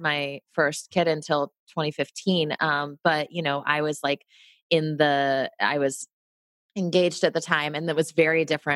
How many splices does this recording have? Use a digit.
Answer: 0